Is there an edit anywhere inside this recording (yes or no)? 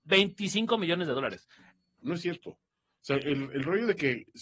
yes